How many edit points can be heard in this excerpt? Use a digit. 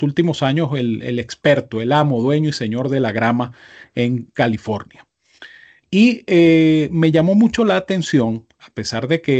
1